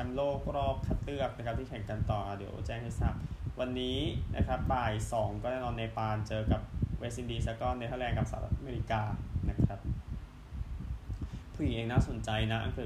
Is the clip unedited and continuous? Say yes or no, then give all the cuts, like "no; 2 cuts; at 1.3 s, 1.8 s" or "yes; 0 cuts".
yes; 0 cuts